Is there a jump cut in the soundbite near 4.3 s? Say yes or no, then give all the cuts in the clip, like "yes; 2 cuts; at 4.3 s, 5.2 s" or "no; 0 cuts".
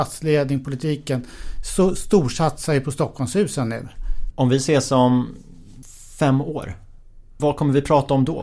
yes; 1 cut; at 4.3 s